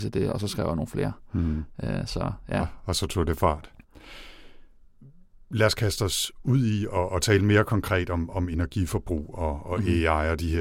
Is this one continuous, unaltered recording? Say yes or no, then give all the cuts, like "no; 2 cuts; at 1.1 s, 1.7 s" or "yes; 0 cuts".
yes; 0 cuts